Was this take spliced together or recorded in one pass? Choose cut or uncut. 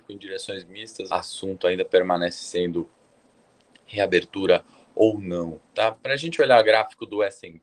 cut